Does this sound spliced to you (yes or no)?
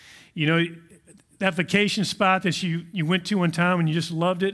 no